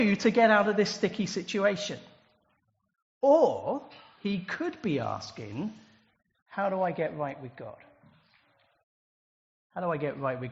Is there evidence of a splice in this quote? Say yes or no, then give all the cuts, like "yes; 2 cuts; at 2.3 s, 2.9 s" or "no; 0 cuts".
no; 0 cuts